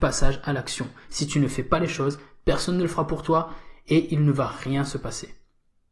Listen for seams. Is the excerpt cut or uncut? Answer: uncut